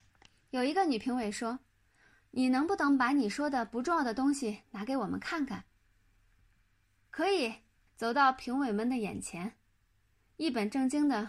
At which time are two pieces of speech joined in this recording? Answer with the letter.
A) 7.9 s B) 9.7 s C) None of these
A